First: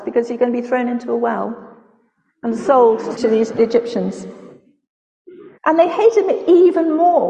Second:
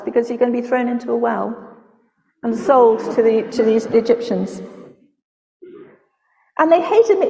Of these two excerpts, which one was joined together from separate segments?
first; 2 cuts; at 3.2 s, 5.6 s

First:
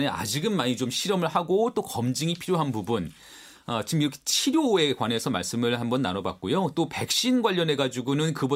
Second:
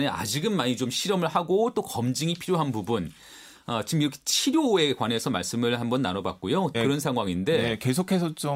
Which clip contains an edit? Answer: second; 1 cut; at 6.7 s

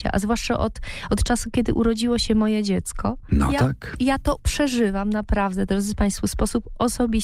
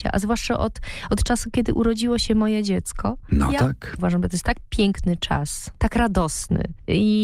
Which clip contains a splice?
second; 1 cut; at 4.0 s

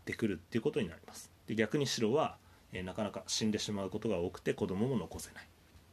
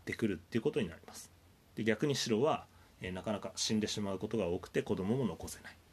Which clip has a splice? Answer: first; 1 cut; at 1.4 s

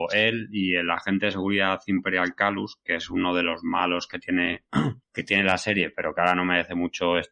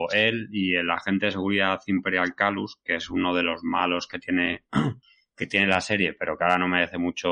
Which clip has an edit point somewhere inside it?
first; 1 cut; at 5.0 s

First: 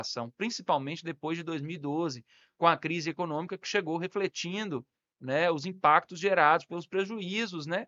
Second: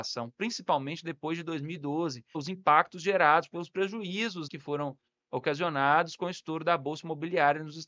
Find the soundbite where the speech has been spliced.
second; 2 cuts; at 2.3 s, 4.5 s

